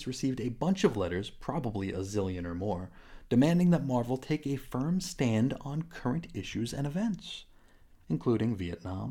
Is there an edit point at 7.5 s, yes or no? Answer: no